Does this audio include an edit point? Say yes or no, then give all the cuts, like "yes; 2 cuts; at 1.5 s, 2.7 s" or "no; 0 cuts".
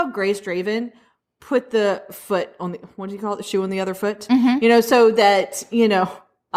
no; 0 cuts